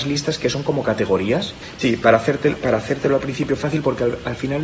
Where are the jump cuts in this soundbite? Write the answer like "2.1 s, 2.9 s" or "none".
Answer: 1.8 s